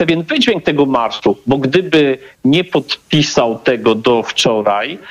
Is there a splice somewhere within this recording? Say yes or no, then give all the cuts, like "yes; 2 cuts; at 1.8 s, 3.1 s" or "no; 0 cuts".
no; 0 cuts